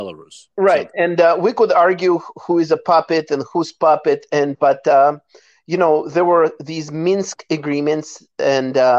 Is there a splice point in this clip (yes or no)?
no